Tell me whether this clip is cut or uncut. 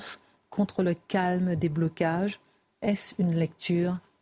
uncut